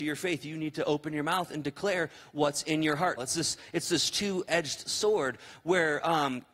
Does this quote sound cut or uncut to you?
cut